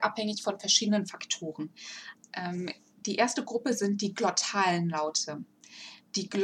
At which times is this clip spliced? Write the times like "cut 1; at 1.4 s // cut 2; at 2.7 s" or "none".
cut 1; at 2.2 s